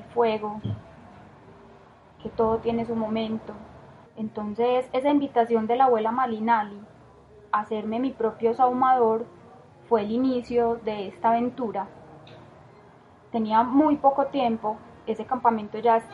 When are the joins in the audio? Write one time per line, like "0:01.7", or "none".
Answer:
0:04.1